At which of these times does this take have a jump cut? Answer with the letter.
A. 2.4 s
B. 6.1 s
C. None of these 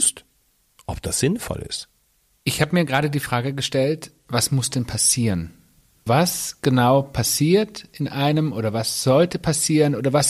B